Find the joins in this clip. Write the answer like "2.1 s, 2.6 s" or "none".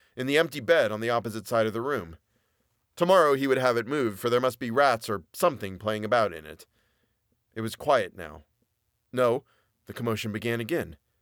none